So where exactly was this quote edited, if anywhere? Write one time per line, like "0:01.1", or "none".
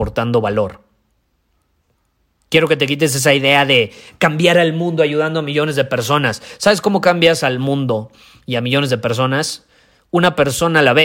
none

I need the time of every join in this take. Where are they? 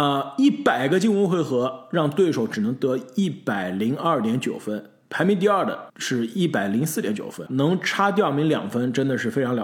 0:05.9
0:07.5

